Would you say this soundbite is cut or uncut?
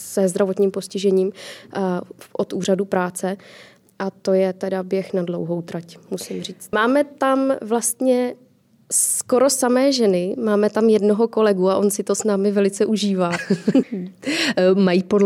cut